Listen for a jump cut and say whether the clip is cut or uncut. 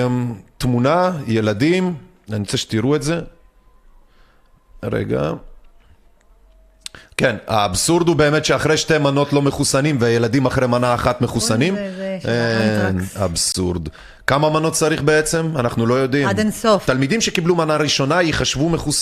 cut